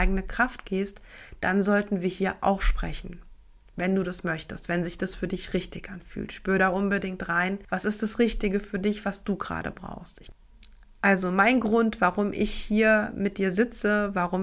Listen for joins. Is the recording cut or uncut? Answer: uncut